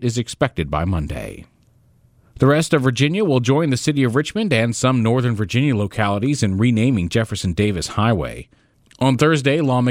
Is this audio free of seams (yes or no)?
yes